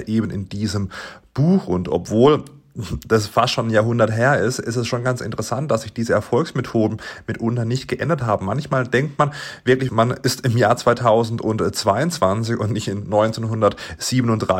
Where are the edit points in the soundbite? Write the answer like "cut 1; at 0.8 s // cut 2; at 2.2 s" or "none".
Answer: cut 1; at 9.9 s